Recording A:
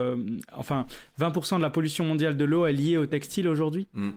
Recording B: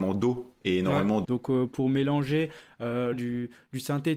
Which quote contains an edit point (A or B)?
B